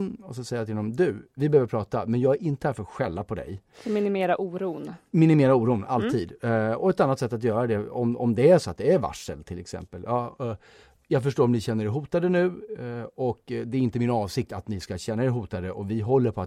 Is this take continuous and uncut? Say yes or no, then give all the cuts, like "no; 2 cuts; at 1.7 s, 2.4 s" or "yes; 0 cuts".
no; 2 cuts; at 1.4 s, 3.7 s